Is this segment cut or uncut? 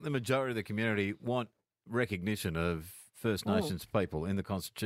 uncut